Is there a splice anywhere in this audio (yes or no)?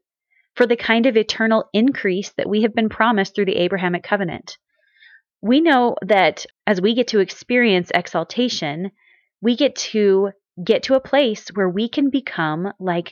yes